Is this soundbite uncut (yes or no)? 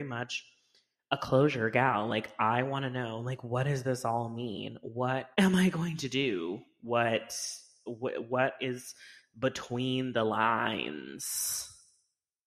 no